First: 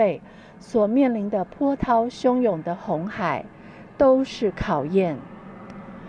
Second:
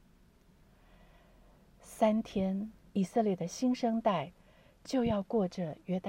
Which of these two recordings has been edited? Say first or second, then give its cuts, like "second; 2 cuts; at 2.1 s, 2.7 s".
second; 1 cut; at 2.9 s